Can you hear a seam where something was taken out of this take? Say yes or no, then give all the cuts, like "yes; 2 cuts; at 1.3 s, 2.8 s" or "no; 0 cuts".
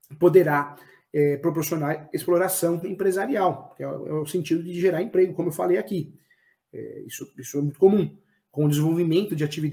no; 0 cuts